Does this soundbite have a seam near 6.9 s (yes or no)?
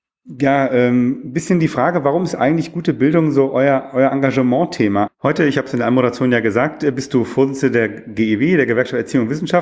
no